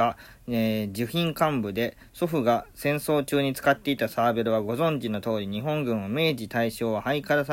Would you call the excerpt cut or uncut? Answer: uncut